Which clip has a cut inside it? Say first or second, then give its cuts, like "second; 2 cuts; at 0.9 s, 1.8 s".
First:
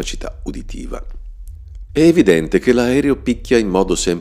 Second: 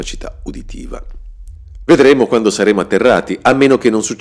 first; 1 cut; at 1.9 s